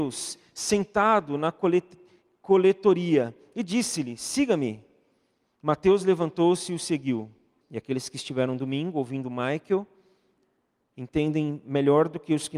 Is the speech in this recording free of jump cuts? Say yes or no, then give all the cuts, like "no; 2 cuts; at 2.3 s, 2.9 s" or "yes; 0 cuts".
no; 1 cut; at 7.6 s